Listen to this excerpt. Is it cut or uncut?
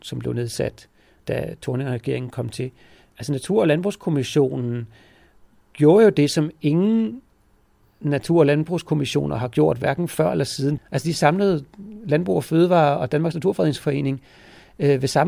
cut